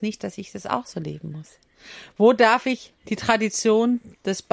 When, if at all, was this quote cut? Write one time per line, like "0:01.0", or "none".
0:03.0